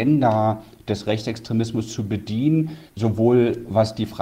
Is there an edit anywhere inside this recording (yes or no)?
yes